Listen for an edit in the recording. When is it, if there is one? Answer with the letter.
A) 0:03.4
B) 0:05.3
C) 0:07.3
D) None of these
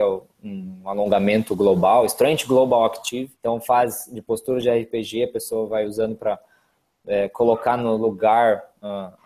A